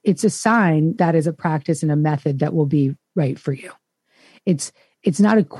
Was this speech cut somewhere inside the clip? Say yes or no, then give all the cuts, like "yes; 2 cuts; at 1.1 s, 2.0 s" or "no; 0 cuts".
yes; 1 cut; at 1.0 s